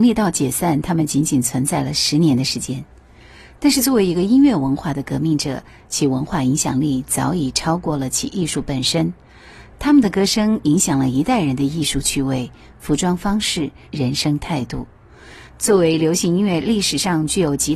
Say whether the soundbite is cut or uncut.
cut